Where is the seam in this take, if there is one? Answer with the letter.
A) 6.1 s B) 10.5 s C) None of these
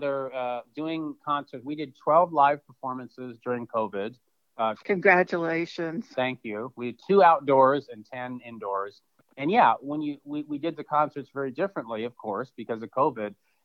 C